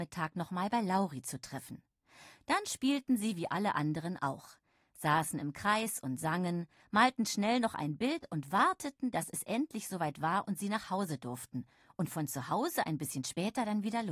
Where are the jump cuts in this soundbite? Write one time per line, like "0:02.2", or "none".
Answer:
none